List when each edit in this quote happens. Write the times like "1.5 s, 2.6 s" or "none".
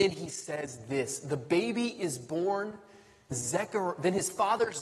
3.3 s